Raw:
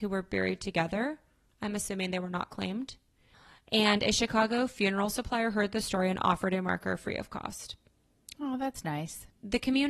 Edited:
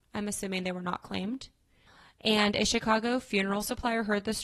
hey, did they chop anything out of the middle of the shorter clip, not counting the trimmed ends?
no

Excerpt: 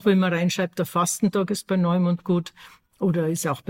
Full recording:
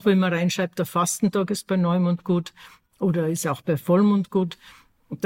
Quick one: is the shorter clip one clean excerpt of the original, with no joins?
yes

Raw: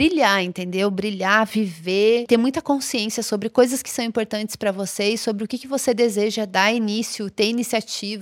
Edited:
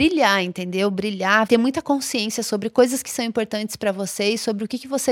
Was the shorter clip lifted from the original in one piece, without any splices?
no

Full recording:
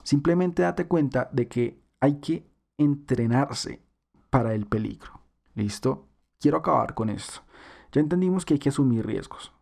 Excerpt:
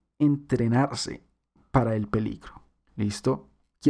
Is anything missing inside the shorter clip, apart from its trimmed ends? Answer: no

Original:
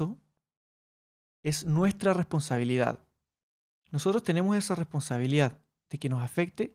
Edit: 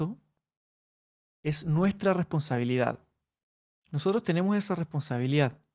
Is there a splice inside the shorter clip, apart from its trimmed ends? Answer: no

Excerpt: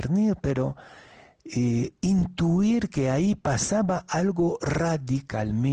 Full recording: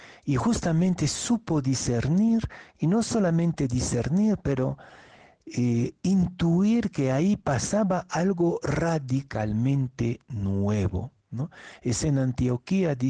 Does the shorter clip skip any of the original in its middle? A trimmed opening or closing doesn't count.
no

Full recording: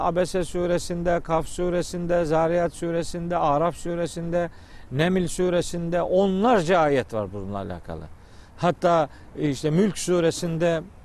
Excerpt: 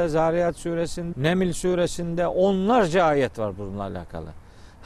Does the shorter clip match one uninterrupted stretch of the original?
no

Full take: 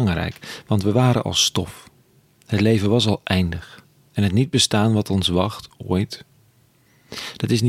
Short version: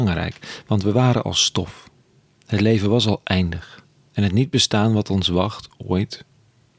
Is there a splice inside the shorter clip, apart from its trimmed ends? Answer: no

